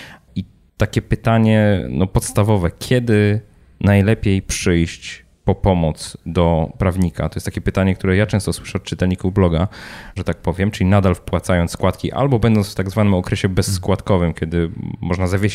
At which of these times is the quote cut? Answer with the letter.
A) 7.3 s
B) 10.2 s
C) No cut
B